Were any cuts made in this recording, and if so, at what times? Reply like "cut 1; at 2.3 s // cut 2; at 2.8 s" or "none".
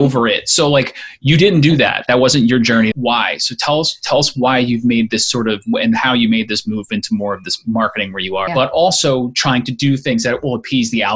cut 1; at 2.9 s // cut 2; at 8.5 s